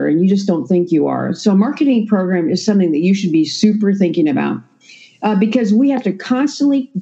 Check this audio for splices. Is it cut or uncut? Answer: uncut